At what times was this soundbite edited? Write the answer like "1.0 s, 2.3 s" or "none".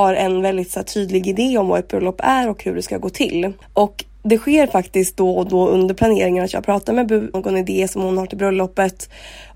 7.3 s

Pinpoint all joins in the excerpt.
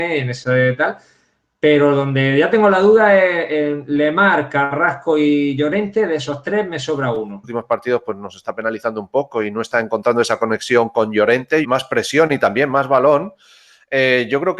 7.4 s, 11.6 s

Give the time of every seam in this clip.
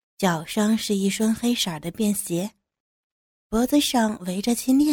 none

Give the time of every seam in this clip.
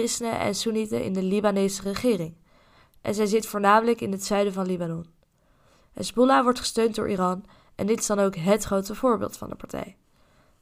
none

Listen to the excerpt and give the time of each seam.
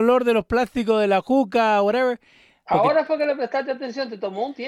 2.6 s

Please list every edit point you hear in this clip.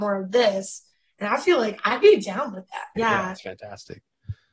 3.0 s

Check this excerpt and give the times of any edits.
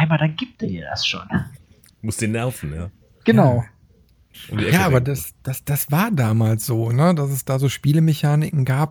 none

